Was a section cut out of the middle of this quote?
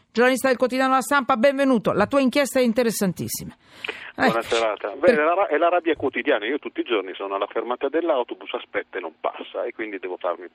no; 0 cuts

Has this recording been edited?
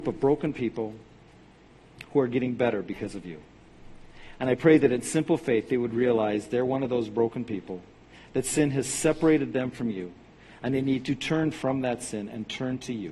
no; 0 cuts

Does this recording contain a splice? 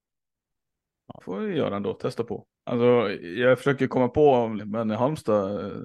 yes; 3 cuts; at 1.2 s, 2.5 s, 4.6 s

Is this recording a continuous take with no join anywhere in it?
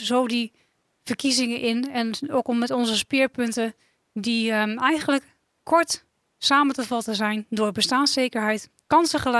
yes; 0 cuts

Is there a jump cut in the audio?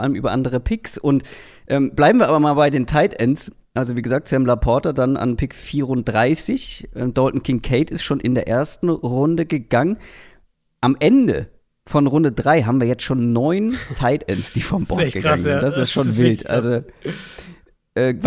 no; 0 cuts

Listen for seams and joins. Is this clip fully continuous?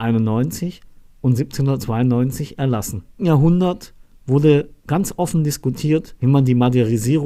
no; 1 cut; at 3.2 s

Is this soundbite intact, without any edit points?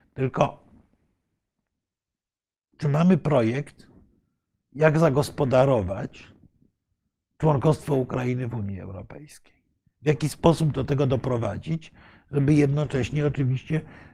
yes; 0 cuts

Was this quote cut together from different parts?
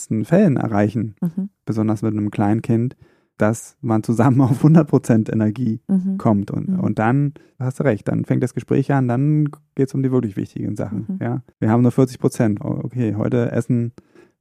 yes; 2 cuts; at 11.5 s, 12.6 s

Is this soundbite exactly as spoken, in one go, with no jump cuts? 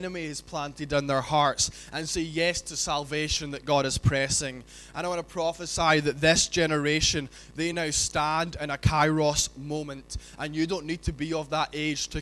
yes; 0 cuts

